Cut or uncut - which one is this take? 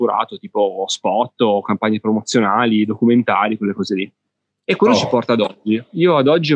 cut